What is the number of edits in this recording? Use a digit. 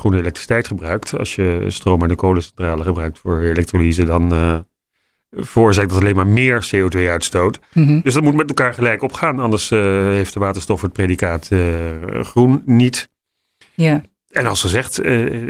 0